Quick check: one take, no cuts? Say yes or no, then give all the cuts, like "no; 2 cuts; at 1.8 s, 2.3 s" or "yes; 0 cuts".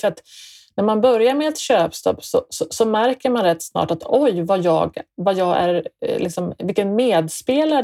yes; 0 cuts